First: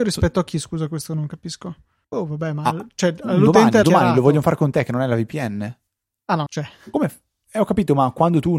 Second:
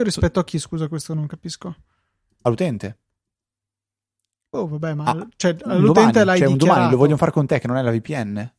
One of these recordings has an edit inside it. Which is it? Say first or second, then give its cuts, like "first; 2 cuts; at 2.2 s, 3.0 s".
first; 3 cuts; at 2.0 s, 3.8 s, 6.5 s